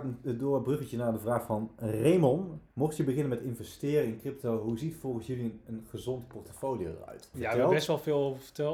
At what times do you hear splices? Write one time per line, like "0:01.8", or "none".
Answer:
0:02.7
0:07.3